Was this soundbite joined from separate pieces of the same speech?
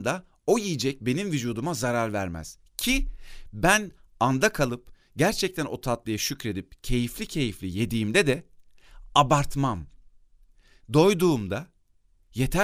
no; 0 cuts

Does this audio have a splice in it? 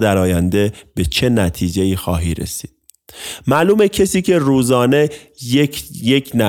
no; 0 cuts

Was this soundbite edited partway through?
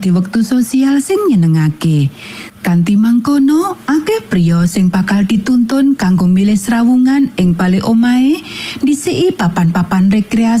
yes; 1 cut; at 2.5 s

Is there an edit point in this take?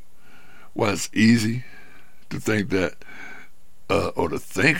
no; 0 cuts

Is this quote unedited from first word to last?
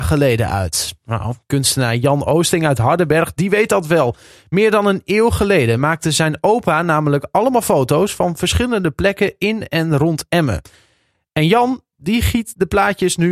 yes; 0 cuts

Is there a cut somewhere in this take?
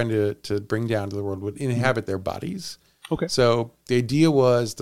no; 0 cuts

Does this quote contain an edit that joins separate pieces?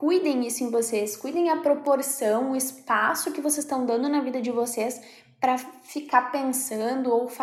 no; 0 cuts

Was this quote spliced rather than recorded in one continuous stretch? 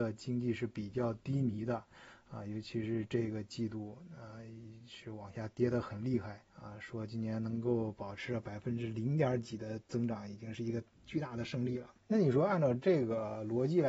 yes; 2 cuts; at 6.5 s, 12.0 s

